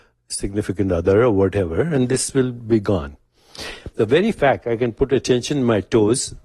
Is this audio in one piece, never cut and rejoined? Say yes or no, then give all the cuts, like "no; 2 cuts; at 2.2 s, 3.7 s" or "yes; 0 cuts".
no; 1 cut; at 3.9 s